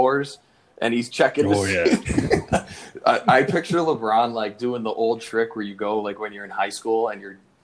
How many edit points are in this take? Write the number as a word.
one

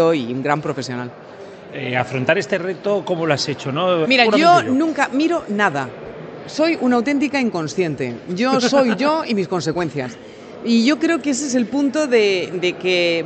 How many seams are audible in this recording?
one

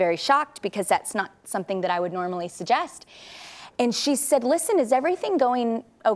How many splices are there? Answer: zero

